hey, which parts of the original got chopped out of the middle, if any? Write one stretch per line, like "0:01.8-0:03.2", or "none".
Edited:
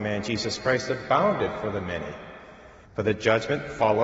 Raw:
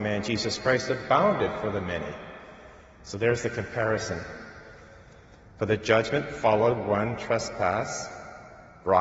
0:02.8-0:05.5